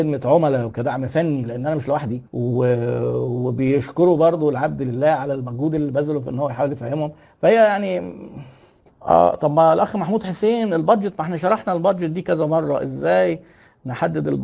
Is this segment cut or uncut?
cut